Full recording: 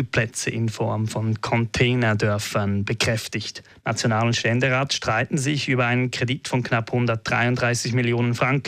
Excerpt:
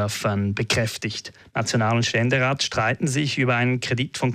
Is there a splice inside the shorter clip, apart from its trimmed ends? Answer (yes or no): no